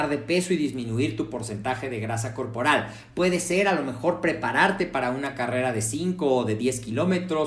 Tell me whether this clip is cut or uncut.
uncut